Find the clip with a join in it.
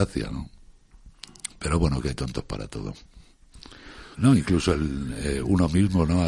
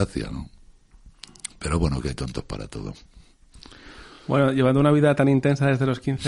first; 1 cut; at 4.1 s

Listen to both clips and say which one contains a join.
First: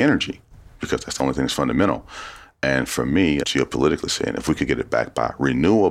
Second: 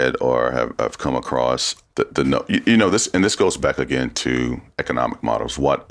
first; 1 cut; at 3.4 s

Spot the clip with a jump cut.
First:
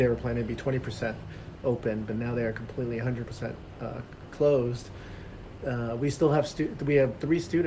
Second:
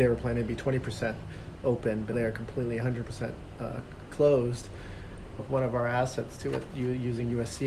second; 2 cuts; at 2.1 s, 5.4 s

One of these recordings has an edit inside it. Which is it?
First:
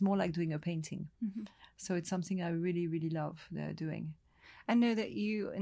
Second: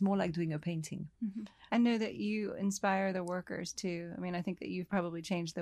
second; 1 cut; at 1.7 s

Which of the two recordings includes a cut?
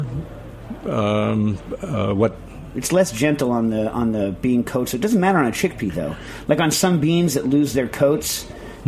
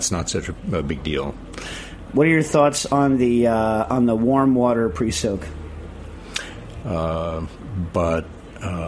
second; 2 cuts; at 2.1 s, 6.8 s

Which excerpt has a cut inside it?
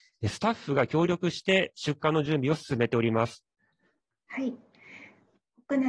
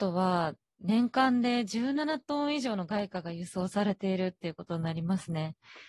first; 1 cut; at 4.1 s

